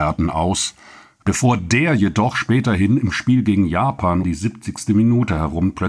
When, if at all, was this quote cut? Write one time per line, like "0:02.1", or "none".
0:01.2
0:04.2